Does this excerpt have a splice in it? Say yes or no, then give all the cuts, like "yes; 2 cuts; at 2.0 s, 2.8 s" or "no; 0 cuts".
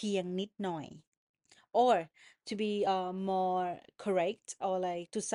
no; 0 cuts